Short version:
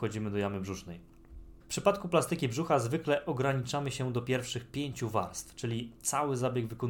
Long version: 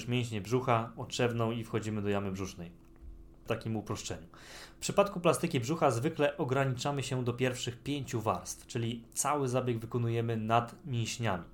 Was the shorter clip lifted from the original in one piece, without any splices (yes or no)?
no